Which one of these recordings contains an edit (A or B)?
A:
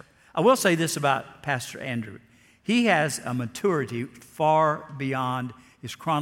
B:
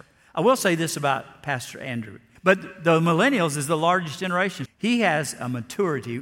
B